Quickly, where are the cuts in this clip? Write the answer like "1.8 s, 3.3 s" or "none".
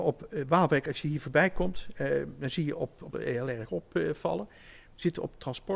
3.1 s